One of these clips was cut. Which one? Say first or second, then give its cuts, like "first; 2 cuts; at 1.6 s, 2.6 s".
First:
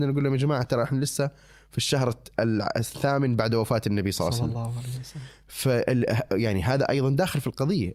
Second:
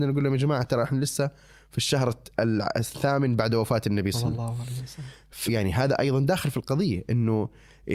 second; 2 cuts; at 4.1 s, 5.5 s